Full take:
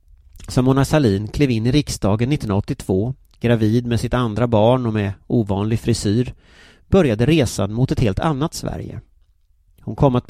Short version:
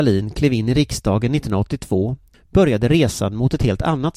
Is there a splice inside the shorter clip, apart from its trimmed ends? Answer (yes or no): yes